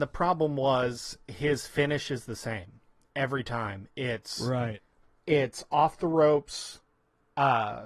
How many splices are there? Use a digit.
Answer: 0